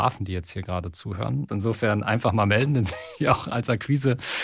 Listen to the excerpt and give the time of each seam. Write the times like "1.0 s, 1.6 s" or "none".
1.5 s